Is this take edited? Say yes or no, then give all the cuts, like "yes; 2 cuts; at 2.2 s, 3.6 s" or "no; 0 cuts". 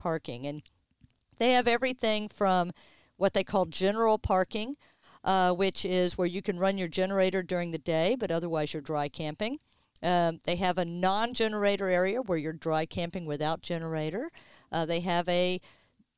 no; 0 cuts